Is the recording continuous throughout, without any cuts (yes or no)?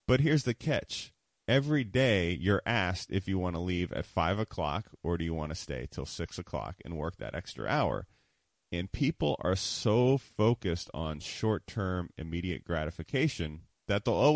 yes